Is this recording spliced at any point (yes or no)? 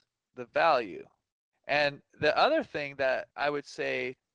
yes